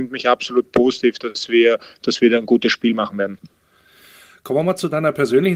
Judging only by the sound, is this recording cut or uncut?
uncut